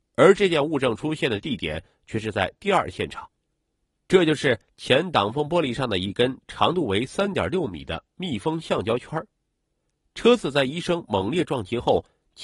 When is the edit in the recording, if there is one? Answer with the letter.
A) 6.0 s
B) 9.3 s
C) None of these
C